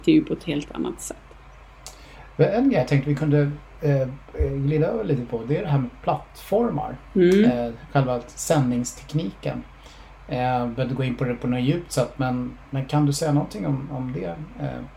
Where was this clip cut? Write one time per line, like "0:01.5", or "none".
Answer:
none